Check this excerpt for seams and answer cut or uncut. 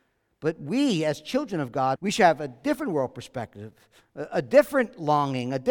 cut